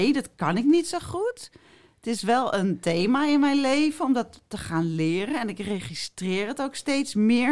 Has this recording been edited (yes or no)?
no